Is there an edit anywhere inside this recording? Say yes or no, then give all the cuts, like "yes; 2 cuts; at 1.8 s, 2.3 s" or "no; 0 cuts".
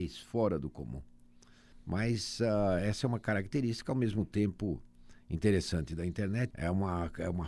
yes; 2 cuts; at 1.7 s, 6.5 s